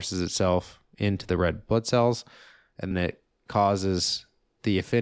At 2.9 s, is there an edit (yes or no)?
yes